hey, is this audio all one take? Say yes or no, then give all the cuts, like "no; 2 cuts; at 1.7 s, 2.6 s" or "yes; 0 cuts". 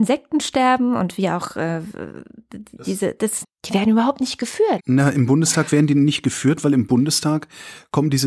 no; 2 cuts; at 3.4 s, 4.8 s